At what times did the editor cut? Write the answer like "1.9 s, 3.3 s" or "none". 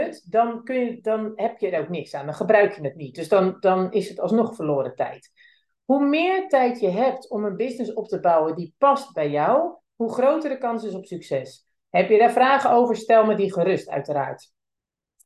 11.8 s

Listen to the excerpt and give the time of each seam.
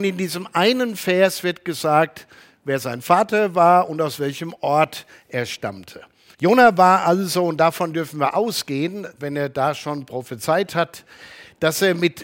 6.3 s

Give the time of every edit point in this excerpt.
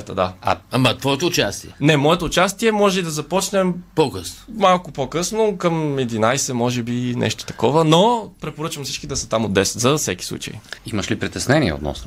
10.8 s

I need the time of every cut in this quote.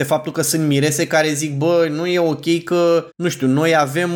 3.1 s

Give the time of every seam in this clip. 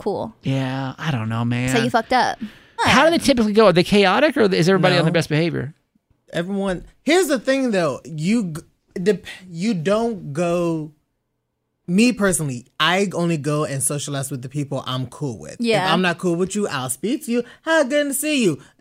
2.8 s

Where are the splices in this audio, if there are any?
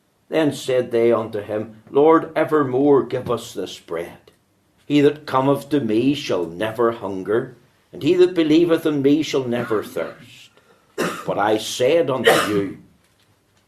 4.8 s

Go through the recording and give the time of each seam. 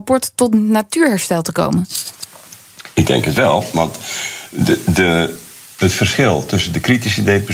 none

